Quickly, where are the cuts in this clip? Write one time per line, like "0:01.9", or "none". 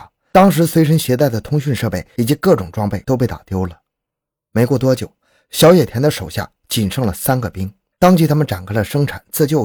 0:07.9